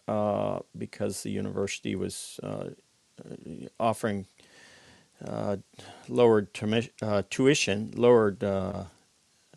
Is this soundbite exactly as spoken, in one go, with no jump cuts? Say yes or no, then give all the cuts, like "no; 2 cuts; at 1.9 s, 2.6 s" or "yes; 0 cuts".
yes; 0 cuts